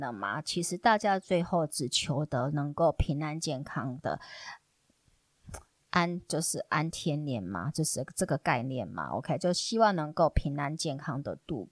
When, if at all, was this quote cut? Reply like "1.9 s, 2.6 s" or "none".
none